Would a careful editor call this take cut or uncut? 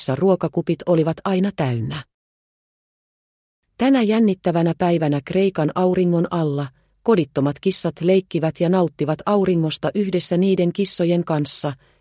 uncut